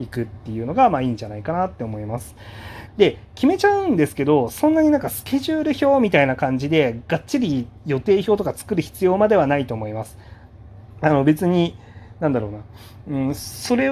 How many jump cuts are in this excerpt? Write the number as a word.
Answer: one